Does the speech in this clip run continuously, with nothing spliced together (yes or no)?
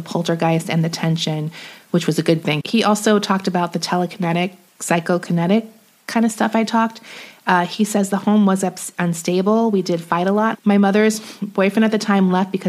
no